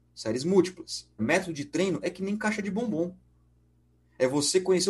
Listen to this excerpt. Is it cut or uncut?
cut